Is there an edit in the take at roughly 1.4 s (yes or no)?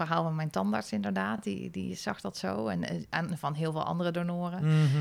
no